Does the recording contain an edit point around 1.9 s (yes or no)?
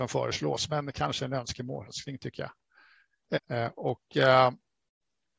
yes